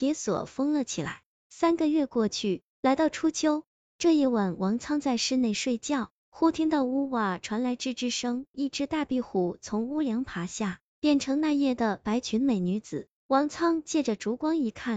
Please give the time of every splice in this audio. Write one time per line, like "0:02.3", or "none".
0:08.5